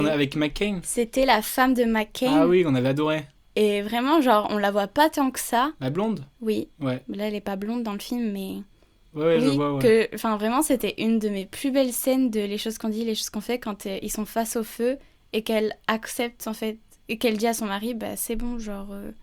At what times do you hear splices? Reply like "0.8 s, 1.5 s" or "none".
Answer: none